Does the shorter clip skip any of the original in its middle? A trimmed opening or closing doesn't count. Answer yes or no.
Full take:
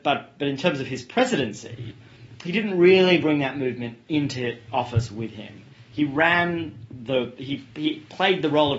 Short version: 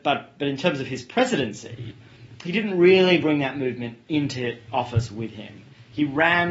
no